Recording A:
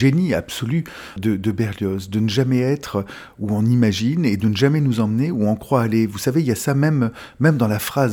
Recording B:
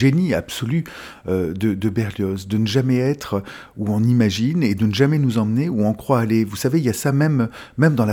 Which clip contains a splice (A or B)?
A